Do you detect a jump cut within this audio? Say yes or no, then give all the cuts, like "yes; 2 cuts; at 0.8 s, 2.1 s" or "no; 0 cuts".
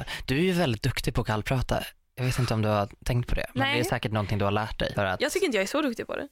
yes; 1 cut; at 4.9 s